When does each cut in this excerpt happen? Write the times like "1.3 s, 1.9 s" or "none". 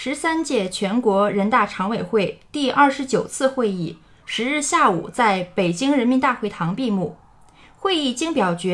none